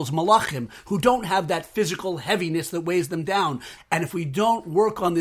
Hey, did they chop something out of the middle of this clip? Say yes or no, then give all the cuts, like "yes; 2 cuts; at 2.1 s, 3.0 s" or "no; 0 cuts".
yes; 1 cut; at 3.8 s